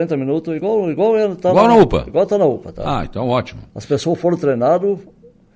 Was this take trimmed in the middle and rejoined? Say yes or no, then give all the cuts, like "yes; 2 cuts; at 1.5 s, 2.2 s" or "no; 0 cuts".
no; 0 cuts